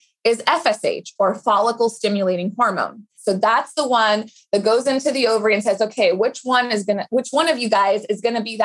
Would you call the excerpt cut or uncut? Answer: cut